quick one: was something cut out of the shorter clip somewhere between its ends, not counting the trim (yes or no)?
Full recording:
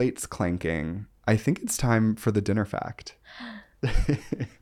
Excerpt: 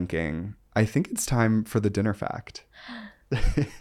no